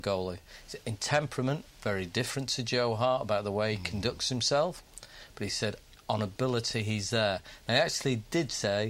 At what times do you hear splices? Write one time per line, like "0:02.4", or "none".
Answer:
none